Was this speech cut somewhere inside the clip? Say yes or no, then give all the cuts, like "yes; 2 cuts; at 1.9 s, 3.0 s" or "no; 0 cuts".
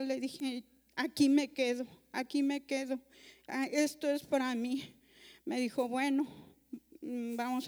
no; 0 cuts